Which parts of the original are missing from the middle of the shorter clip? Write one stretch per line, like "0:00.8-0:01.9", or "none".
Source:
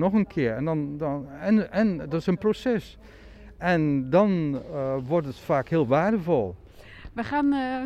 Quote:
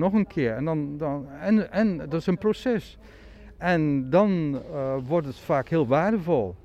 none